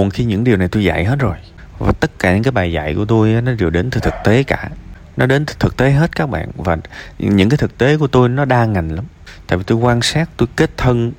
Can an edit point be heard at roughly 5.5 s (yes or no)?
yes